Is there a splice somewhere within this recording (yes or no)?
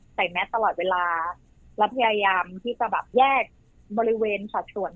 no